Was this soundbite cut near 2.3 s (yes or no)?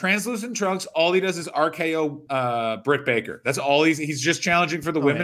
yes